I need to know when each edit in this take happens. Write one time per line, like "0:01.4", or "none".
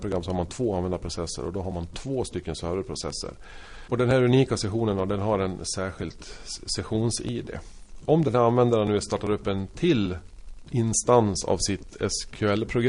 0:03.9